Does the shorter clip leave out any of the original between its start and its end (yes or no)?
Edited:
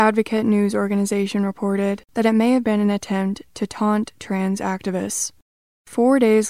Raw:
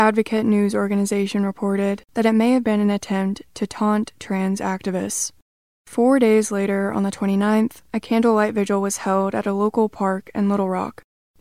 no